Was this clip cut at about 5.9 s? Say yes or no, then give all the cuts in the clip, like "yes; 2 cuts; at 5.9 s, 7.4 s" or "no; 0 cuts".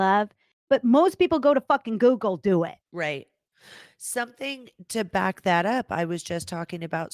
no; 1 cut; at 2.8 s